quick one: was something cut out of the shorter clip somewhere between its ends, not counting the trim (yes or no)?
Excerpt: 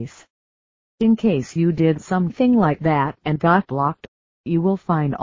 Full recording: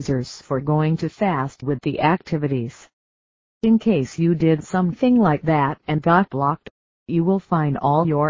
no